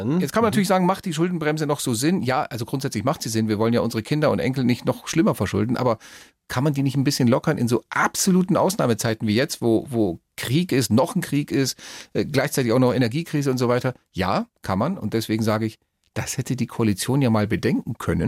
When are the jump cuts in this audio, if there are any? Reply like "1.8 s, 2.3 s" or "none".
none